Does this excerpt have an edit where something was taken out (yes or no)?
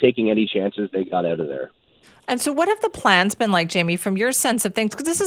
no